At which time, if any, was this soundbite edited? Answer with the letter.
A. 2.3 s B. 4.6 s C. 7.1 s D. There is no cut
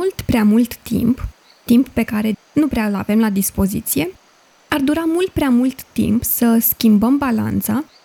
A